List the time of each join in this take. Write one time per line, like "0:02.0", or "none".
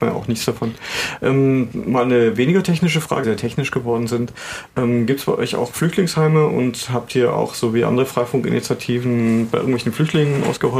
0:03.2